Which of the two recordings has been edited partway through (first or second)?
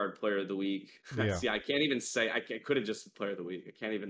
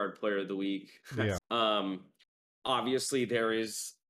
second